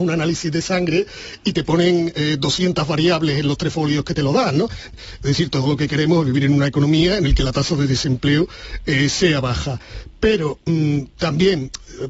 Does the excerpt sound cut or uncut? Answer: cut